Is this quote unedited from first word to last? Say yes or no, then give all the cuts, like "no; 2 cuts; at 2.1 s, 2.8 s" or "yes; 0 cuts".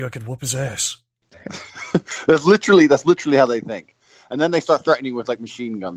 yes; 0 cuts